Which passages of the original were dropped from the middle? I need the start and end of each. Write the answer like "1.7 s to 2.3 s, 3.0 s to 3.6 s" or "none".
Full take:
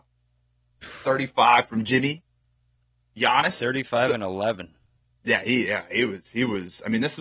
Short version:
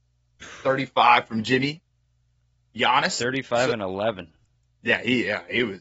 none

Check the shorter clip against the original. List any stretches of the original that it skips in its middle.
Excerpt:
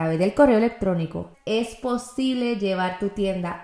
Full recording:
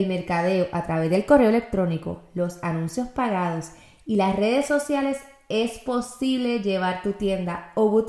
2.2 s to 5.4 s

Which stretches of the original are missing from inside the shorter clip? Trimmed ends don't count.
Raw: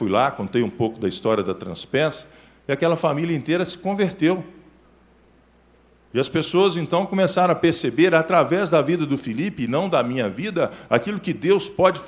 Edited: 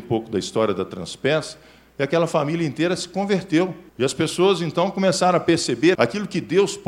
4.6 s to 6.0 s, 8.1 s to 10.9 s

